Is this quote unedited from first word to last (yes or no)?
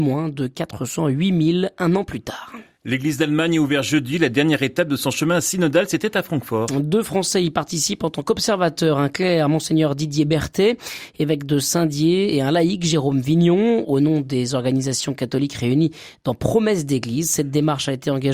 yes